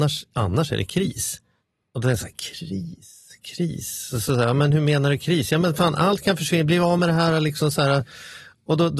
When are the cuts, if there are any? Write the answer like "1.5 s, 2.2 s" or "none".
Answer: none